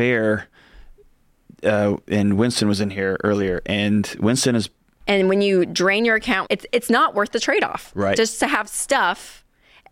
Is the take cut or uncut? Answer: cut